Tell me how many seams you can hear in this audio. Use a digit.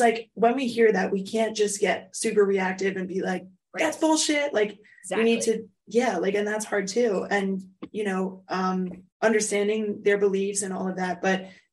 1